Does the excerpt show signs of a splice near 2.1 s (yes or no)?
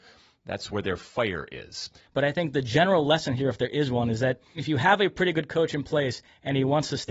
yes